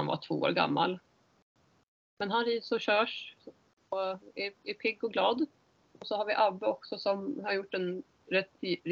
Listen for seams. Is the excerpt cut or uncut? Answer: uncut